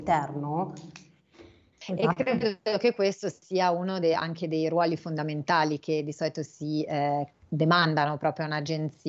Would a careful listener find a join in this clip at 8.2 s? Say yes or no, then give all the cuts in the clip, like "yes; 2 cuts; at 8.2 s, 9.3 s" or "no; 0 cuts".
no; 1 cut; at 1.8 s